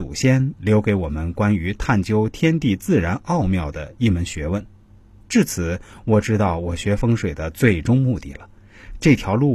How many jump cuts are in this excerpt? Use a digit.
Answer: 0